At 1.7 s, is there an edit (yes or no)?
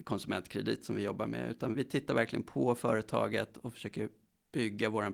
yes